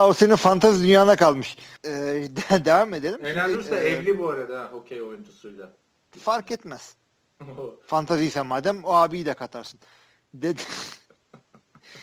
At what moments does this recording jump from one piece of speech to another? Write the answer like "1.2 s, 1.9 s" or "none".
1.8 s